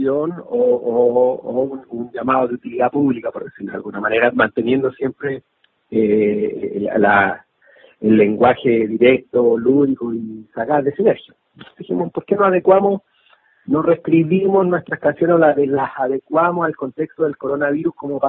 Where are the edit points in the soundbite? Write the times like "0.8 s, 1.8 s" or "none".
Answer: 11.7 s